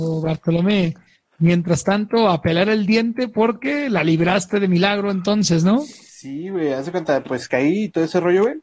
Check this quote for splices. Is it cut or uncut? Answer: uncut